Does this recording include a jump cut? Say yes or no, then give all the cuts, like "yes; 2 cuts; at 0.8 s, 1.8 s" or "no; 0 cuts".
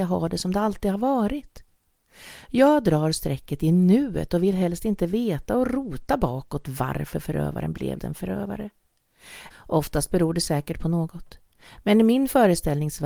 yes; 2 cuts; at 8.0 s, 9.5 s